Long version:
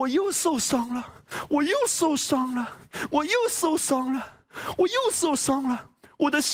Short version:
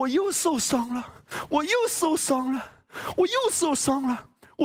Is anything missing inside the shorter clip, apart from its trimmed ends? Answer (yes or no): yes